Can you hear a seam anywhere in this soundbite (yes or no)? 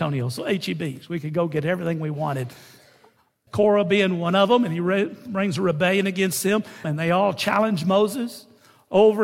yes